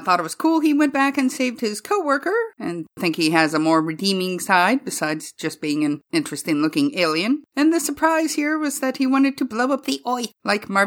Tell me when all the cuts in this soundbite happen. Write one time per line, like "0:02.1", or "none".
0:02.5

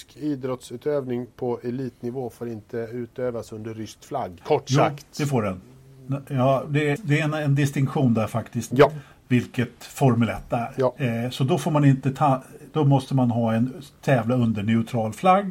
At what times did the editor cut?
0:04.4
0:07.0
0:08.7

